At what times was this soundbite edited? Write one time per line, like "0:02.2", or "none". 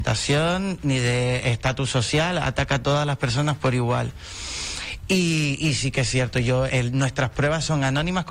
0:06.7